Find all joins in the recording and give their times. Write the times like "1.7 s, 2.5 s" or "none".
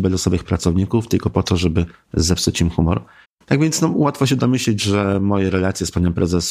3.2 s